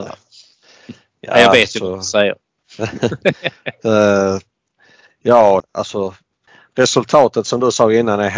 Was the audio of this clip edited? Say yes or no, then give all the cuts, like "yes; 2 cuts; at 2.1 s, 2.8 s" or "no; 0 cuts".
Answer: yes; 1 cut; at 5.6 s